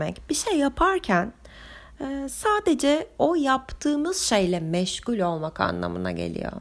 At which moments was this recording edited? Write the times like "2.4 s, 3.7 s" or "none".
none